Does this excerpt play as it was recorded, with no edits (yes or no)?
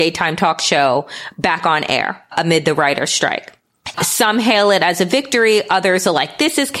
no